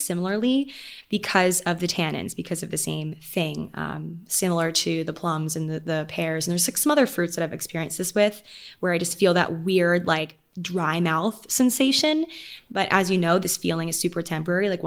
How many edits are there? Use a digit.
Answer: 0